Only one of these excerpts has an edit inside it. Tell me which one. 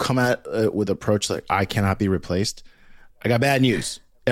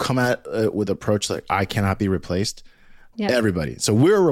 second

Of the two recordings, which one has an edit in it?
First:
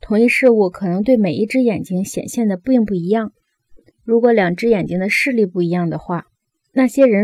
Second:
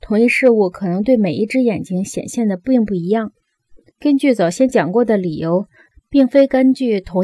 second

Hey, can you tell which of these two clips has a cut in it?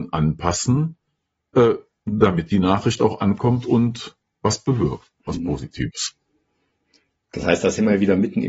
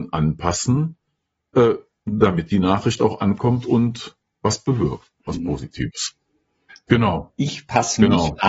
second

